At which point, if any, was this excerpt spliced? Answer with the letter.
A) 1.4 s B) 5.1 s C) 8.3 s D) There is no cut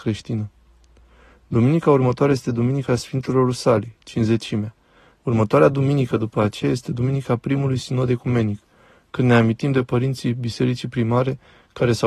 B